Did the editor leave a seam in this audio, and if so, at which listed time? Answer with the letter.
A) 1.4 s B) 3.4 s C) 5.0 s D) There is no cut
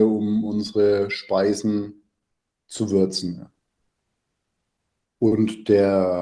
C